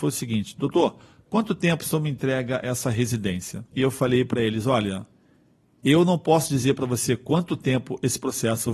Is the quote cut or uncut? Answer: cut